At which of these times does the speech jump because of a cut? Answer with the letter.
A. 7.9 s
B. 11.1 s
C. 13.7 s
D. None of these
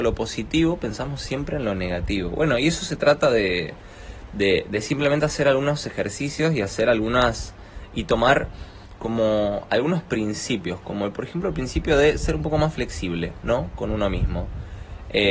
D